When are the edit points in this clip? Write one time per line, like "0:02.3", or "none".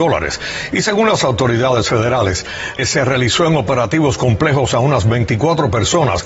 0:02.8